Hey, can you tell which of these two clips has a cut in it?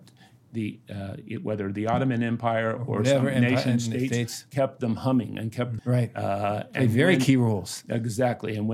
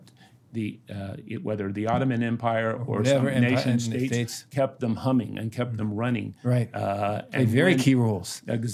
first; 1 cut; at 5.8 s

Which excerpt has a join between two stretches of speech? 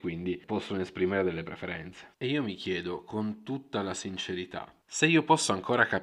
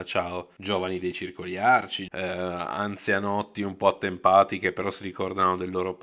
second; 1 cut; at 2.1 s

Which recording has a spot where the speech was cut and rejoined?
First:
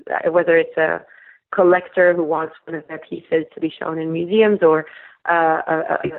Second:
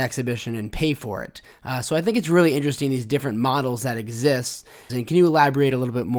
second; 1 cut; at 4.9 s

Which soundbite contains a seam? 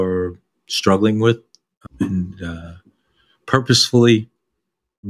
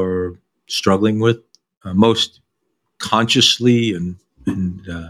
first; 1 cut; at 1.9 s

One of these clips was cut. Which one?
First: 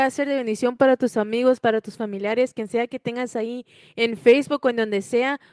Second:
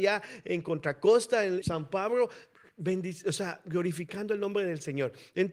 second; 1 cut; at 1.6 s

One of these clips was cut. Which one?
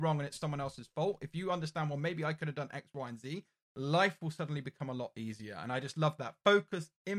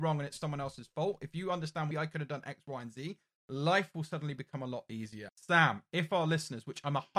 second; 2 cuts; at 1.9 s, 5.3 s

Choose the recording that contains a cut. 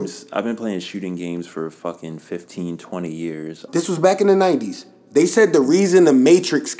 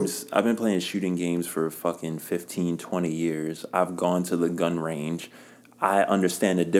first; 1 cut; at 3.7 s

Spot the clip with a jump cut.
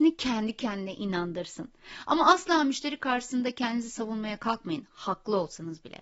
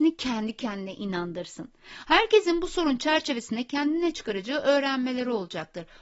second; 1 cut; at 2.0 s

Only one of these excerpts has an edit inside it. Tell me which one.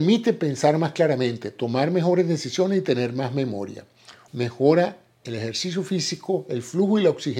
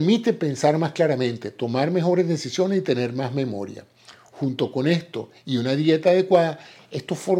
first; 1 cut; at 4.3 s

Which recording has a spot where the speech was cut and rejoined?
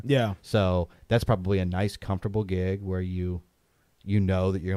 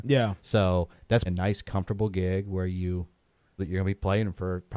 second; 2 cuts; at 1.3 s, 3.6 s

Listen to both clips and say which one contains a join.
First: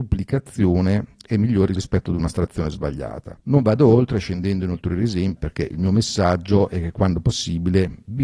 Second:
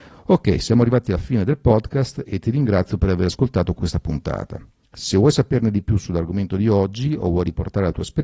first; 1 cut; at 5.4 s

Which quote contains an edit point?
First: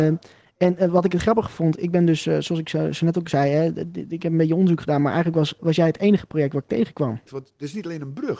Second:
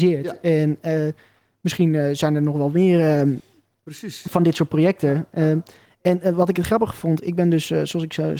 first; 2 cuts; at 5.6 s, 7.3 s

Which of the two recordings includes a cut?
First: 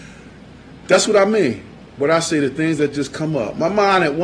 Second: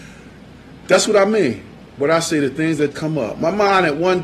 second; 1 cut; at 2.9 s

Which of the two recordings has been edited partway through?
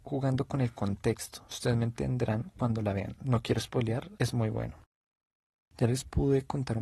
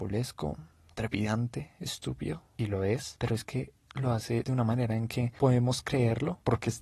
first; 1 cut; at 4.2 s

